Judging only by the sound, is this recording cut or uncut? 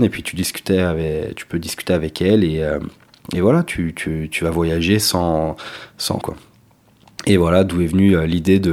cut